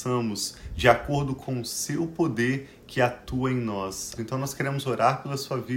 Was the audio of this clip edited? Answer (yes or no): yes